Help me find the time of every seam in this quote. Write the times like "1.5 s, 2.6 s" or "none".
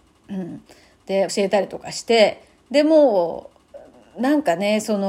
1.3 s